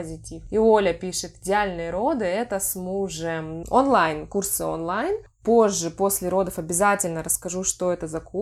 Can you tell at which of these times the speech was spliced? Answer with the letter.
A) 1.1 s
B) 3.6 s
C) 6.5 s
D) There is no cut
B